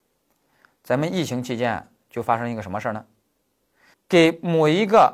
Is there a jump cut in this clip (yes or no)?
yes